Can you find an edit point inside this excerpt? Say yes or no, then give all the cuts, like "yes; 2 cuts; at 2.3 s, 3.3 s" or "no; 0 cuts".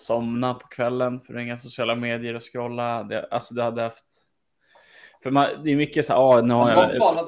no; 0 cuts